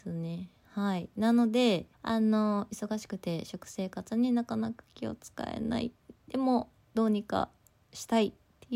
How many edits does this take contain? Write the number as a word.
one